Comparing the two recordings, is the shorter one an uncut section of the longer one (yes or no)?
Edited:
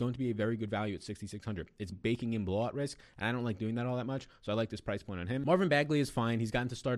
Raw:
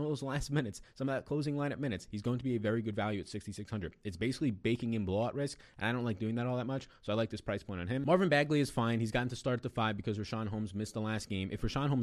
no